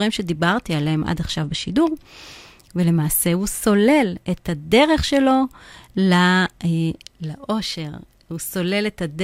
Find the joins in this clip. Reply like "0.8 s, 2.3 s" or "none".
none